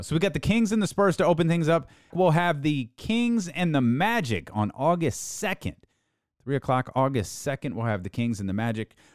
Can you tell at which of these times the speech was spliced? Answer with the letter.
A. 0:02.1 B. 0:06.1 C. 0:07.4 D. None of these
A